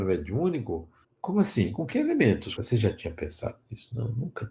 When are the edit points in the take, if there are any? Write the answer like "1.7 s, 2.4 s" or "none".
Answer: 1.0 s, 2.6 s